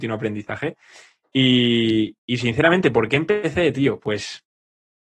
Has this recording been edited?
no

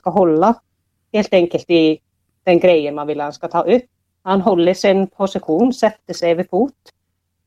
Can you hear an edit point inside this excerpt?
yes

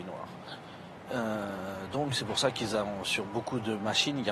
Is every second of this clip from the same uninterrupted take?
no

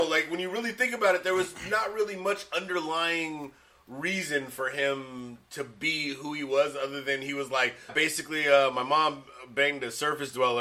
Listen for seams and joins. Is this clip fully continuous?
no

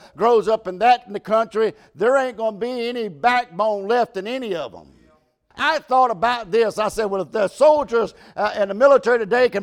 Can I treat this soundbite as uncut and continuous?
no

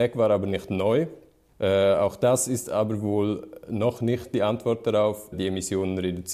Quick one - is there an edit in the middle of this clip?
yes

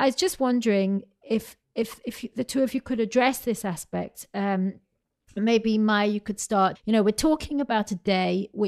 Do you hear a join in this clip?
yes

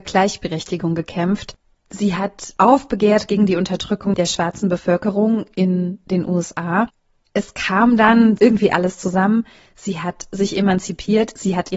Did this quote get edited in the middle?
yes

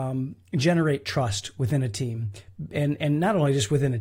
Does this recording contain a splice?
no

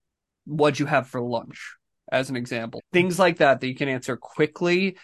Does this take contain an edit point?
yes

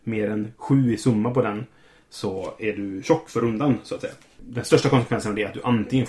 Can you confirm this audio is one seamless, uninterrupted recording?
yes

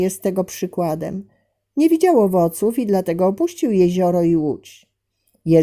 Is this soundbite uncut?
yes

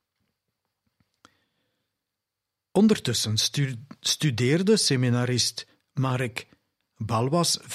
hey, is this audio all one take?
yes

